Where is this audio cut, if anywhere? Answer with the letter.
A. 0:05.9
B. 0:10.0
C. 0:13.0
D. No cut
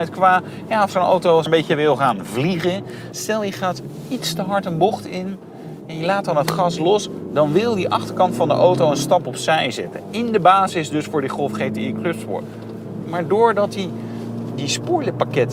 D